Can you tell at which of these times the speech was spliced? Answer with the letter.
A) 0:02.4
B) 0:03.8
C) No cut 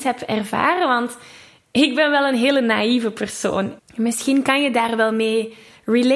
B